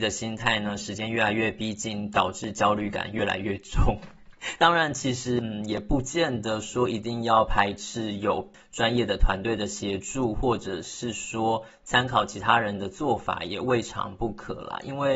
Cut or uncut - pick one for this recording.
cut